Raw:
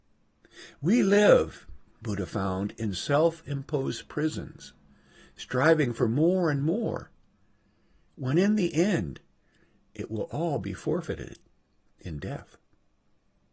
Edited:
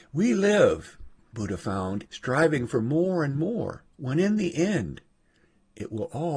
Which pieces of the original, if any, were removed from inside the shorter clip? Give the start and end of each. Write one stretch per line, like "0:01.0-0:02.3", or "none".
0:02.7-0:05.3
0:07.2-0:08.1